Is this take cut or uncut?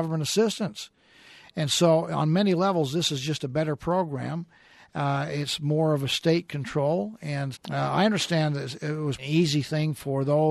cut